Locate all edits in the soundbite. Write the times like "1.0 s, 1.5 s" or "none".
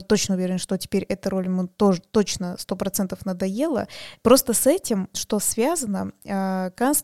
5.1 s